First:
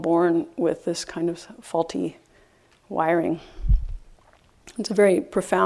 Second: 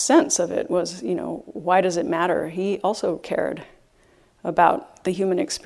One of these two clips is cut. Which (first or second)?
second